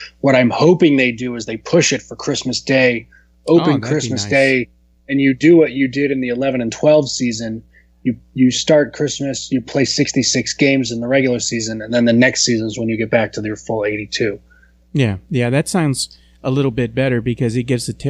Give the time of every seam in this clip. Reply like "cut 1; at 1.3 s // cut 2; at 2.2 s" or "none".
none